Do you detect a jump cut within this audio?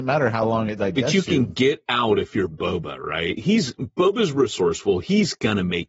no; 0 cuts

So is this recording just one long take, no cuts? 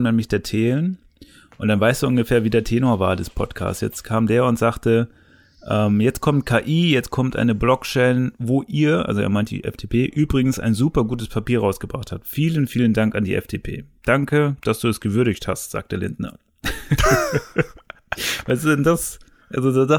yes; 0 cuts

